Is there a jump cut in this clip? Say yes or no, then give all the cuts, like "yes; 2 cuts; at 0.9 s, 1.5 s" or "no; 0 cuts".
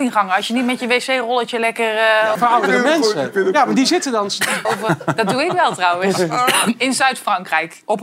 yes; 2 cuts; at 2.3 s, 4.6 s